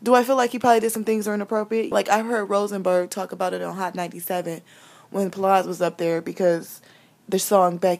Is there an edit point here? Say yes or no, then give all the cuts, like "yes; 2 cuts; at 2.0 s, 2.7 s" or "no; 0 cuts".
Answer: yes; 1 cut; at 1.9 s